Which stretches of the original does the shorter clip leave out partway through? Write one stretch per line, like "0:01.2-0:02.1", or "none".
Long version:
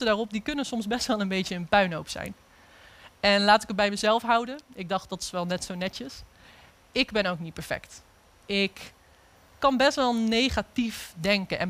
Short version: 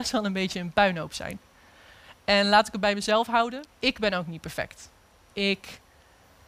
0:04.6-0:06.8